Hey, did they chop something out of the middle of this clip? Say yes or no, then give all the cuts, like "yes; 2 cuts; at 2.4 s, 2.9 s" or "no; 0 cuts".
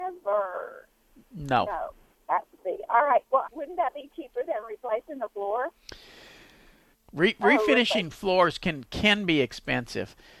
yes; 3 cuts; at 2.1 s, 3.4 s, 6.9 s